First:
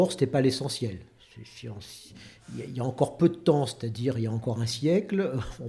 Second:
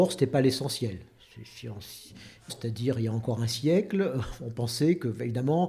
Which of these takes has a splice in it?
second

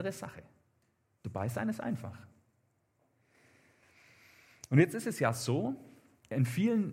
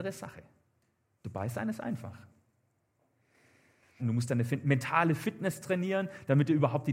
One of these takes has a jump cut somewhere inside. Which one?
second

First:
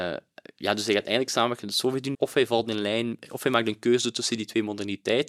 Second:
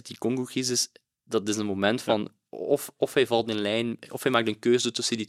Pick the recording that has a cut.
first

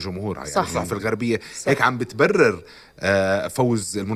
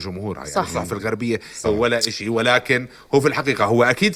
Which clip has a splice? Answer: second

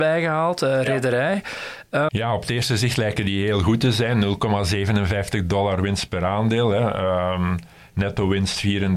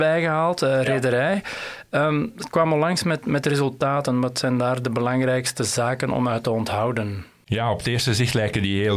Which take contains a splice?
first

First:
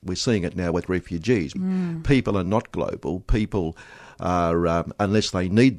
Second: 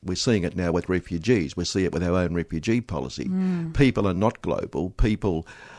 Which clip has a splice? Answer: first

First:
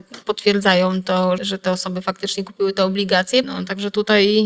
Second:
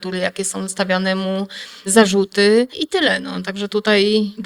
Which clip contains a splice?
first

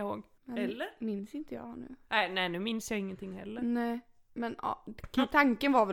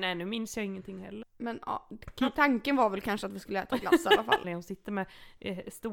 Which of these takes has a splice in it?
second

